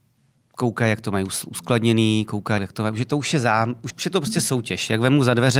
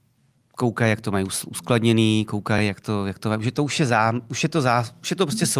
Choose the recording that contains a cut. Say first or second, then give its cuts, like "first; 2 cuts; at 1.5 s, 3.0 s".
first; 2 cuts; at 2.6 s, 3.9 s